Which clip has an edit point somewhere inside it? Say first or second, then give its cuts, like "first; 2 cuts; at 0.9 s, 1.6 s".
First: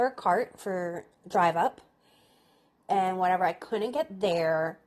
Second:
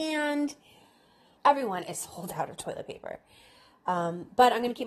second; 1 cut; at 1.4 s